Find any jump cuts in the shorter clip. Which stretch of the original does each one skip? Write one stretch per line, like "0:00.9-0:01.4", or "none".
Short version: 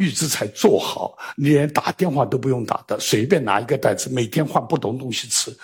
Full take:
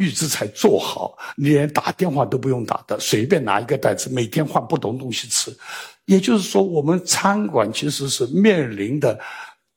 none